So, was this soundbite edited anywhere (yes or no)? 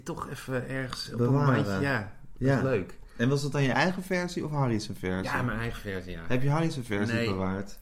no